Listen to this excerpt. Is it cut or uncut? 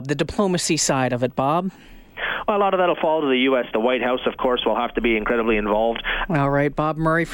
cut